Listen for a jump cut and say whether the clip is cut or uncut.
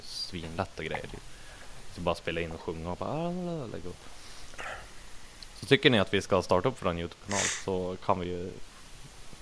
uncut